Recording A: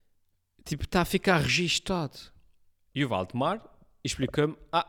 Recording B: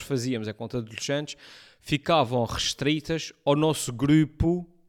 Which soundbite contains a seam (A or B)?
A